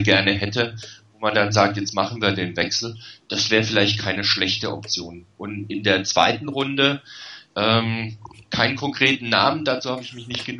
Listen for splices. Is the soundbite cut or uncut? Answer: uncut